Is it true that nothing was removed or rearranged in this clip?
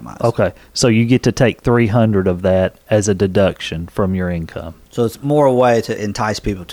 yes; 0 cuts

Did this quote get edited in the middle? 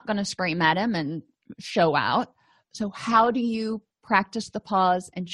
no; 0 cuts

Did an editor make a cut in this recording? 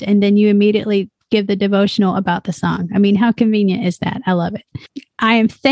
no; 0 cuts

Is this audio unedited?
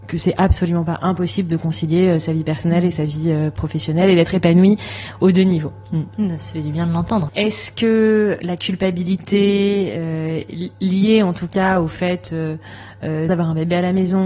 no; 2 cuts; at 7.3 s, 13.3 s

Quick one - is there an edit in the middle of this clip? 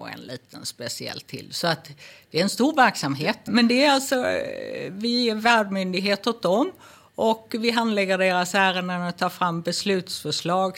yes; 1 cut; at 3.5 s

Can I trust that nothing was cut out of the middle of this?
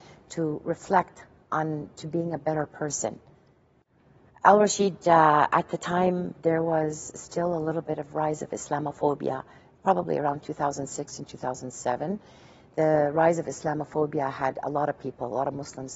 no; 1 cut; at 4.3 s

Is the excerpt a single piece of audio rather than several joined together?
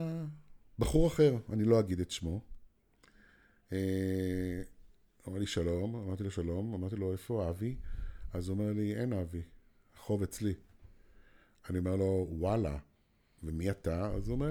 yes; 0 cuts

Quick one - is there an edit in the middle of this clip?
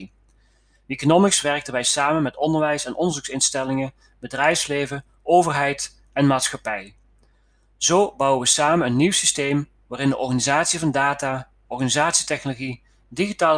no; 0 cuts

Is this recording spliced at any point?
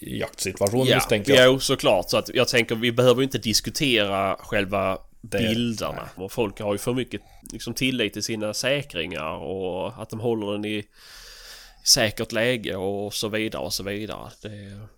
yes; 2 cuts; at 6.2 s, 7.4 s

